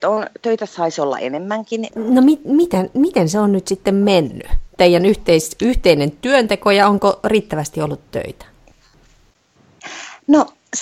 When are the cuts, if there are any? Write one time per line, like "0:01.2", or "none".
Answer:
0:01.9